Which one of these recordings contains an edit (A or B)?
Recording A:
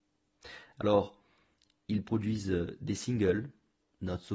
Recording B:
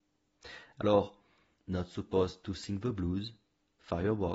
B